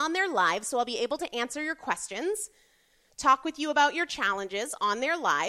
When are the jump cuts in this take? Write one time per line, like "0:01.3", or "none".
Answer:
none